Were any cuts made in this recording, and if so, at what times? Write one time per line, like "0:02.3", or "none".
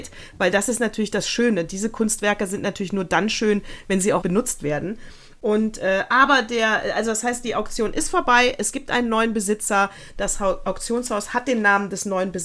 0:04.2